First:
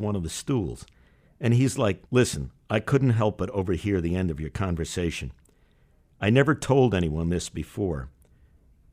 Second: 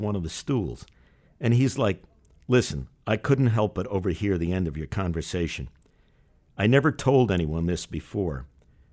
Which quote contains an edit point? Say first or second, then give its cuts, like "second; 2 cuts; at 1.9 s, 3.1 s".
first; 1 cut; at 2.1 s